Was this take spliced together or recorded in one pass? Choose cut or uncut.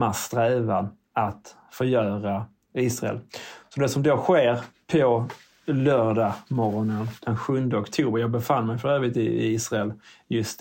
uncut